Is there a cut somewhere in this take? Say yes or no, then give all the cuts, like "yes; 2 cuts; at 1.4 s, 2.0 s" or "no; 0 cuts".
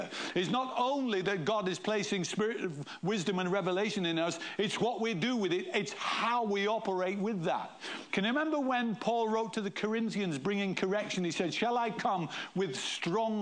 yes; 1 cut; at 8.1 s